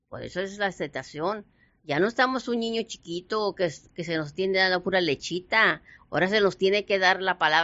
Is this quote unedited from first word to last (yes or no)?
yes